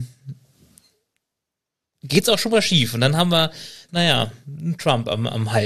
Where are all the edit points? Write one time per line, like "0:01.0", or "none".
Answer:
0:03.9